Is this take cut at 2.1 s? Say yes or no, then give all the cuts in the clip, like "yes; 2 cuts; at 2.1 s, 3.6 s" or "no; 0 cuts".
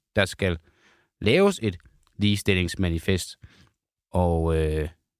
no; 1 cut; at 4.0 s